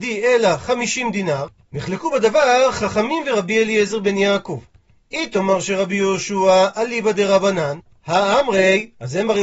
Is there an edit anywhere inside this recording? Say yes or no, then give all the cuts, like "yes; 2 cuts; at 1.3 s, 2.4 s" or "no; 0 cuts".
no; 0 cuts